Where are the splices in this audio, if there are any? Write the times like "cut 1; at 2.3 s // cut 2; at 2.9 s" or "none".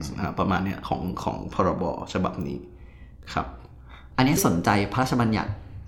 cut 1; at 4.1 s